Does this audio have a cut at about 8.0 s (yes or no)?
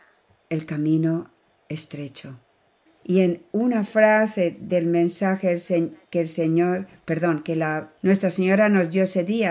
yes